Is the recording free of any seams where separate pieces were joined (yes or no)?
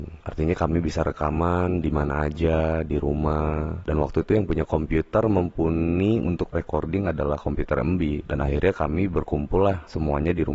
yes